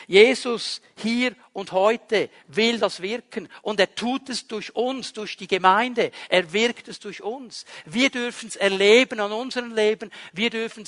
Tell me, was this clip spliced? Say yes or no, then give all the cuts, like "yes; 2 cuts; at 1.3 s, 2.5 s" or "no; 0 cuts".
no; 0 cuts